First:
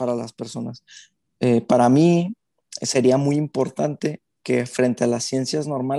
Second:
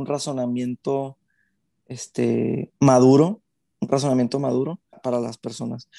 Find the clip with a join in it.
second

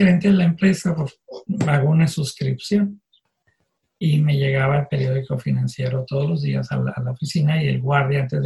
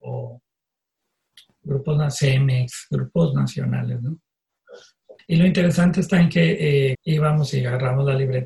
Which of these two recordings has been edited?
second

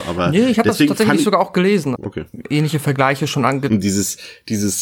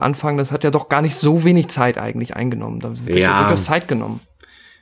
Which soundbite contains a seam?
first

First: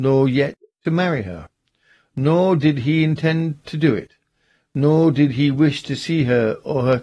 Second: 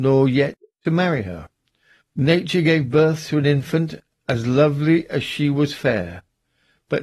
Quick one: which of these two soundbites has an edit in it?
second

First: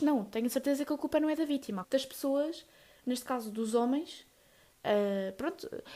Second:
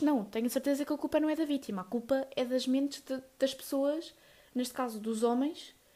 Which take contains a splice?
first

